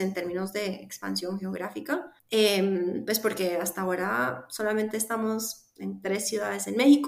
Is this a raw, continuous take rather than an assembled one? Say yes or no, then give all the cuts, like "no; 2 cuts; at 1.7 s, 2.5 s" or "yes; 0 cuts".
no; 1 cut; at 2.2 s